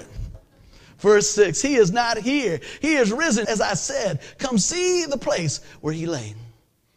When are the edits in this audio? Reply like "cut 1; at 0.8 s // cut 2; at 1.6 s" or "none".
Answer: cut 1; at 3.4 s